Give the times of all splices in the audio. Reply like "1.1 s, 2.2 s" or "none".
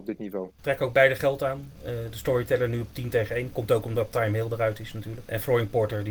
none